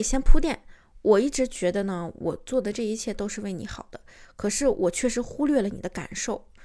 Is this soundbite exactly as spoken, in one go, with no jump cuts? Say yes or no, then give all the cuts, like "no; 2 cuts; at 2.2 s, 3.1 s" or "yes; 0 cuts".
yes; 0 cuts